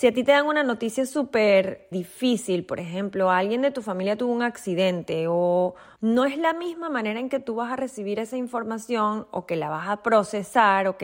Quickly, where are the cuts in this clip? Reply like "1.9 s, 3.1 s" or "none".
1.9 s, 6.0 s